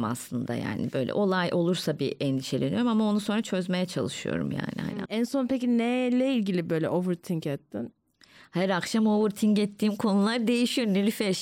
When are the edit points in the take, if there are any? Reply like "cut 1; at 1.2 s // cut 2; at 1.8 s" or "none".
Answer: cut 1; at 5.1 s